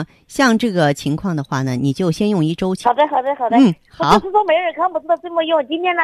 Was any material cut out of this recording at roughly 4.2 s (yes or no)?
no